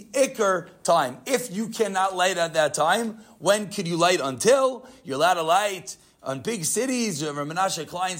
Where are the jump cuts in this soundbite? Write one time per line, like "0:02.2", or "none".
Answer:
none